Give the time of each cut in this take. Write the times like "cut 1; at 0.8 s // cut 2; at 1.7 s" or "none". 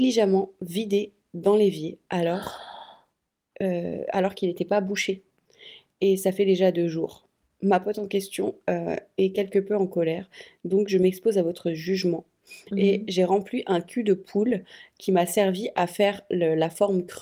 cut 1; at 12.7 s